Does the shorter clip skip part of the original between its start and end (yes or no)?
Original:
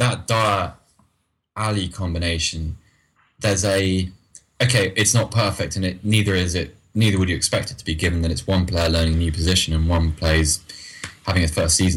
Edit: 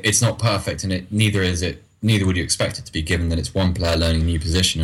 no